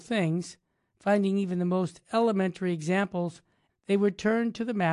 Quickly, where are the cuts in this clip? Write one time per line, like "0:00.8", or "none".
0:03.7